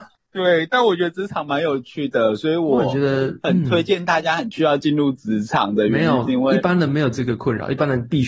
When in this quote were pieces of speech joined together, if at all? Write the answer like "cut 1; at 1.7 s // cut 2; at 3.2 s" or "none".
none